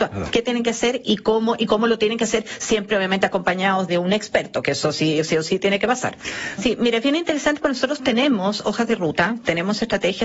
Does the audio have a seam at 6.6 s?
yes; 2 cuts; at 3.9 s, 6.6 s

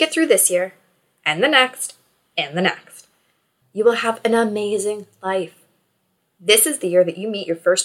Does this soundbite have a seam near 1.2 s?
no; 2 cuts; at 3.6 s, 6.2 s

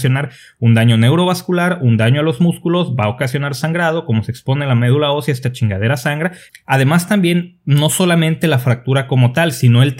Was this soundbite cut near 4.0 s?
no; 1 cut; at 6.5 s

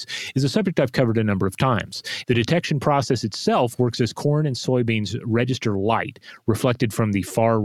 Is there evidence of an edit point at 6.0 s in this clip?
no; 1 cut; at 2.2 s

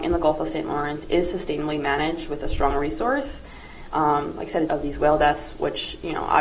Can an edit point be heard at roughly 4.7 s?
yes; 1 cut; at 4.7 s

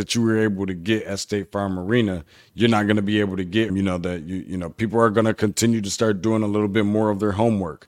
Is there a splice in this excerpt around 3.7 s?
yes; 1 cut; at 3.7 s

